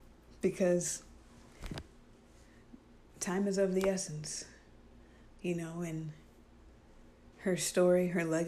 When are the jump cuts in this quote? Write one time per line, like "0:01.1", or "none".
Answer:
0:07.3